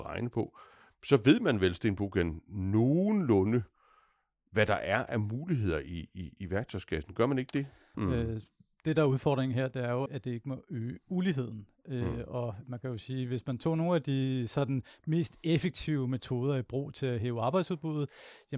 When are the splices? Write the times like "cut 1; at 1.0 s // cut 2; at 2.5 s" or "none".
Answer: cut 1; at 7.9 s // cut 2; at 10.1 s